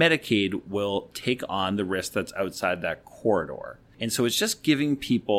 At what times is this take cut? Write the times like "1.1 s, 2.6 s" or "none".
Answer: none

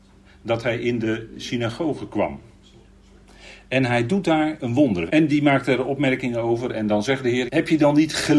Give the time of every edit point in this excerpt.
5.1 s, 7.5 s

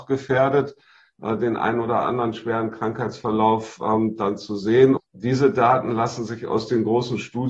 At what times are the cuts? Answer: 5.0 s

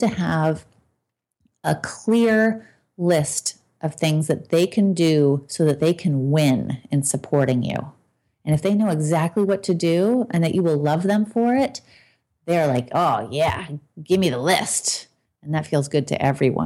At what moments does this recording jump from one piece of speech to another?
15.3 s

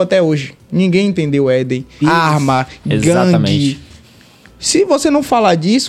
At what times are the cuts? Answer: 2.0 s

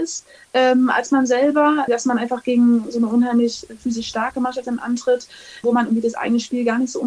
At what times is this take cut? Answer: 1.9 s, 5.6 s

